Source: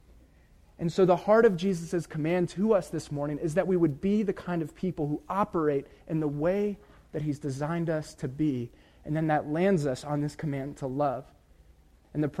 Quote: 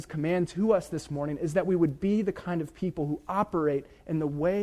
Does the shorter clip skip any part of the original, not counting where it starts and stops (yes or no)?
no